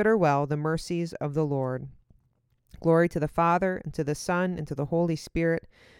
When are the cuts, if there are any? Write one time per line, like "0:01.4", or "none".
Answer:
none